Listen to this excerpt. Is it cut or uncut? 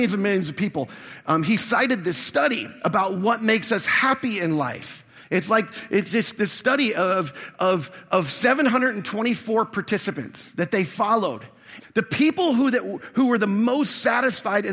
cut